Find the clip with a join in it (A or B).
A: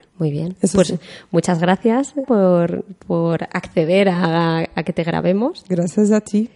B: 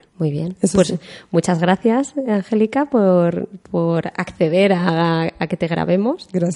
A